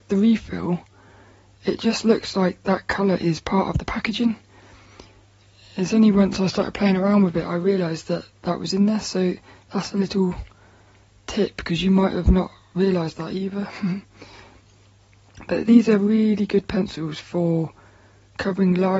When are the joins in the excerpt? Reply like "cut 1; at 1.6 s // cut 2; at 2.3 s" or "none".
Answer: none